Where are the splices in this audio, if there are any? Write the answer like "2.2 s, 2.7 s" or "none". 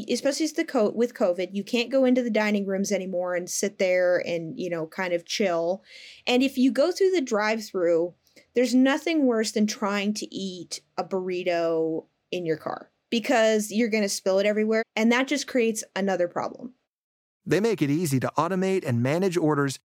14.8 s, 17.3 s

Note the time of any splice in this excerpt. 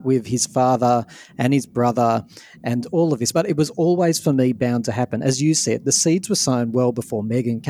none

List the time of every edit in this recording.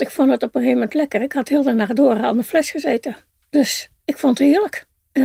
none

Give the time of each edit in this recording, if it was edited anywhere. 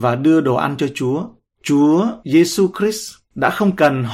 1.5 s

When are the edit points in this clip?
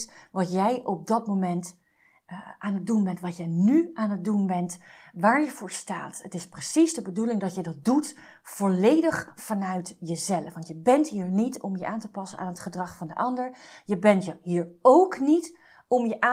none

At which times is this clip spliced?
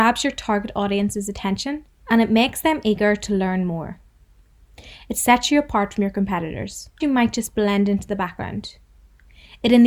7.0 s

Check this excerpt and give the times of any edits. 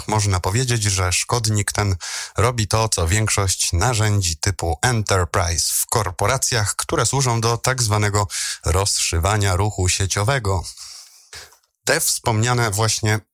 none

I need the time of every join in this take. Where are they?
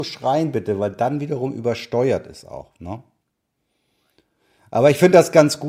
none

